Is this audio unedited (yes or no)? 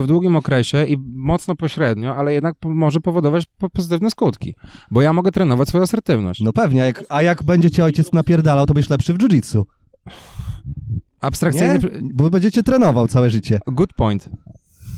yes